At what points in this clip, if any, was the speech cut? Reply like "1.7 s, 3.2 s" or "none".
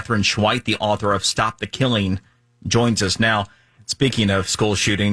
3.8 s